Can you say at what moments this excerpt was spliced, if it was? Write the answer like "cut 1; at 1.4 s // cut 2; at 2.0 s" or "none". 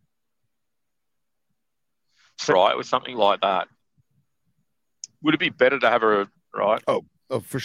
cut 1; at 2.5 s // cut 2; at 6.3 s